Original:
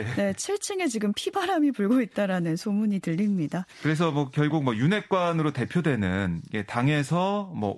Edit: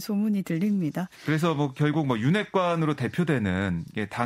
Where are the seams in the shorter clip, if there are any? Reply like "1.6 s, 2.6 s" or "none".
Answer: none